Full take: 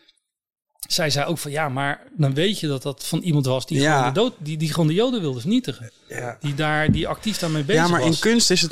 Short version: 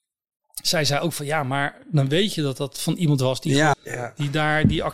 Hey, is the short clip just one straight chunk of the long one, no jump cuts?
no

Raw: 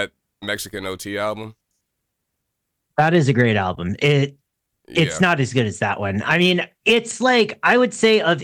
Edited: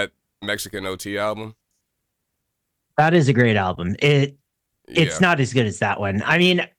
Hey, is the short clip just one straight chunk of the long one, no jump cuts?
yes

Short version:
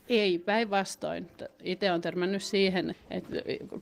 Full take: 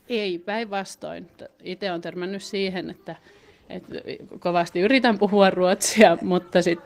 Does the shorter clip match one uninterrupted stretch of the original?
no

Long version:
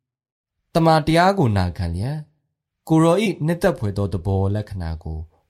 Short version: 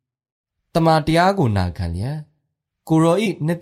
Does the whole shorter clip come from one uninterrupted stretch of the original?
yes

